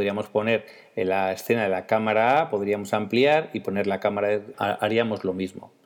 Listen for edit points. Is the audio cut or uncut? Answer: cut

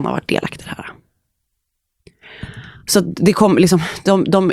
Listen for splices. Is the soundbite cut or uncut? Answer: uncut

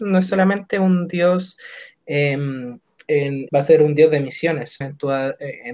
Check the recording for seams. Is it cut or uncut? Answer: cut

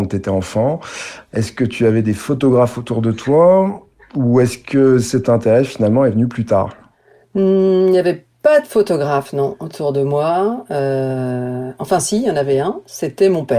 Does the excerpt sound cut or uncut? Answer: uncut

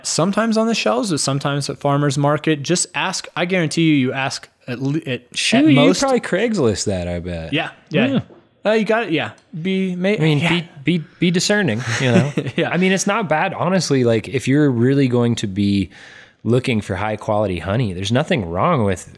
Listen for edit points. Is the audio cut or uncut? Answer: uncut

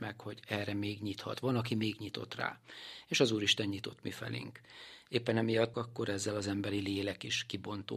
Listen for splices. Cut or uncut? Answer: cut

